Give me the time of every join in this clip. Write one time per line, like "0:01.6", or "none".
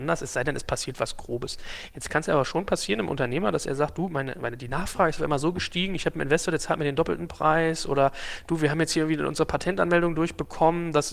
none